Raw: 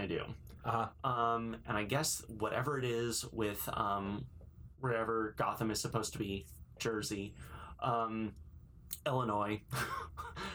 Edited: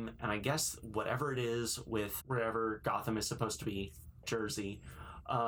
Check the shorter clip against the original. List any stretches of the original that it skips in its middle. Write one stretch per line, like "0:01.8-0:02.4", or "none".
0:03.7-0:04.7